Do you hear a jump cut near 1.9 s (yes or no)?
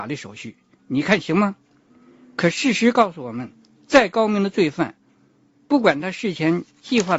yes